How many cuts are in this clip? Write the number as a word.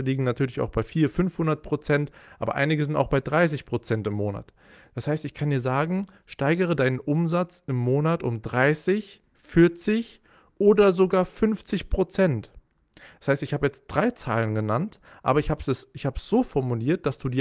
zero